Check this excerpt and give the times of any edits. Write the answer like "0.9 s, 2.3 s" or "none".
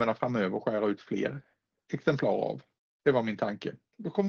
none